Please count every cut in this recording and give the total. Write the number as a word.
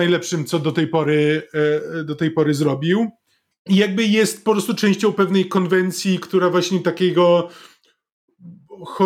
one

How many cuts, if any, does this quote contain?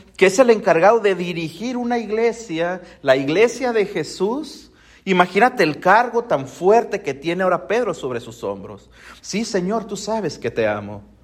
one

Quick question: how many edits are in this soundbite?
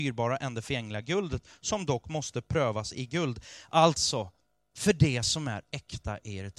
zero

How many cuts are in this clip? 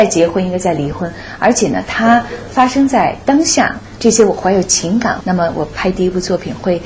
two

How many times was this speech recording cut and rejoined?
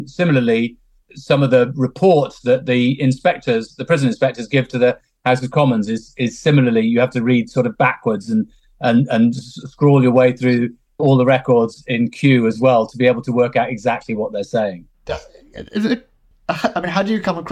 one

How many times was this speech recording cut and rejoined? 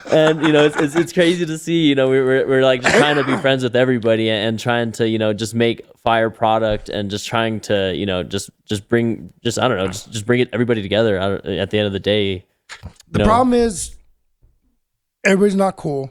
zero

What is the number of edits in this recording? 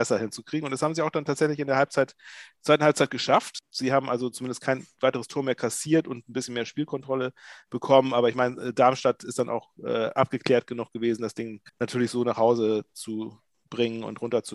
one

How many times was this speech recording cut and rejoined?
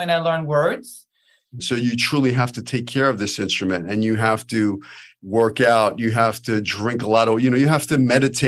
one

